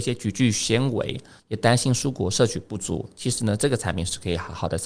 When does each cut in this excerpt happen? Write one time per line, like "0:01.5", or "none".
0:01.4